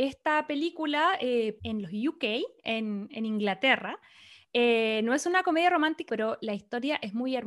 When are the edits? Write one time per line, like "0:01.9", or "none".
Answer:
0:01.6
0:06.1